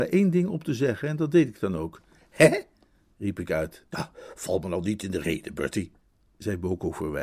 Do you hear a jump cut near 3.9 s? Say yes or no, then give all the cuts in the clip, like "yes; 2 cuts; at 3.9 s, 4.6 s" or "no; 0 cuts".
yes; 1 cut; at 3.9 s